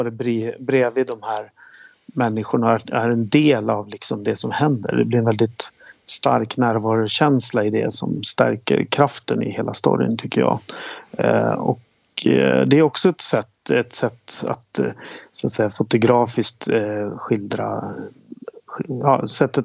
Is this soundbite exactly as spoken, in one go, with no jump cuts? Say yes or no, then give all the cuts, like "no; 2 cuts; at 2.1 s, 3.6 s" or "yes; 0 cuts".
yes; 0 cuts